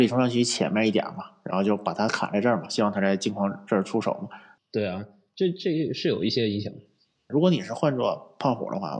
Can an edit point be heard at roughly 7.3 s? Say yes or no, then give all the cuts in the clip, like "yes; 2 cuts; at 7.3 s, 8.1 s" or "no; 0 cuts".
yes; 2 cuts; at 4.6 s, 7.3 s